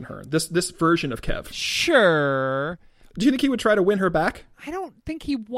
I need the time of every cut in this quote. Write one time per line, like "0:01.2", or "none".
0:04.5